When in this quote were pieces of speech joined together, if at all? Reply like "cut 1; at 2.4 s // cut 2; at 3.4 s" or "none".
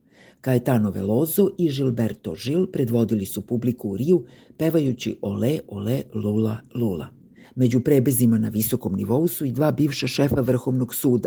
cut 1; at 7.4 s